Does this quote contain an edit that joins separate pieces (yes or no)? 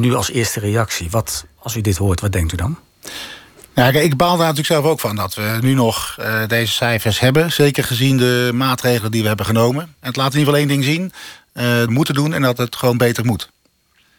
yes